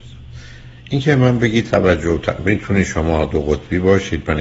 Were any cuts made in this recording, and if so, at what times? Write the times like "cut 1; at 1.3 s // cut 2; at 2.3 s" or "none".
none